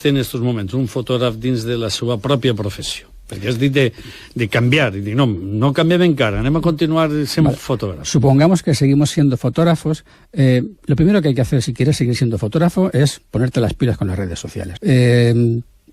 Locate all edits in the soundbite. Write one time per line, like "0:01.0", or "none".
0:10.8
0:14.8